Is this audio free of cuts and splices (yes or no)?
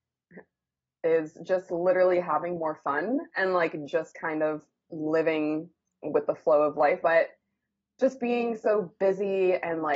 no